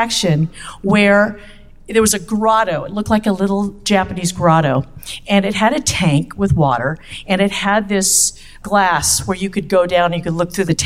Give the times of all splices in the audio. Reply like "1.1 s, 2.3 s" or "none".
none